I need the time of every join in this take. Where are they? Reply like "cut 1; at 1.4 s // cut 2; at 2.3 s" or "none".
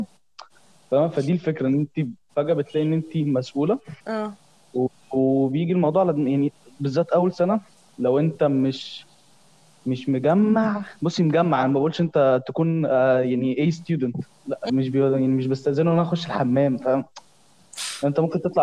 cut 1; at 4.0 s // cut 2; at 14.7 s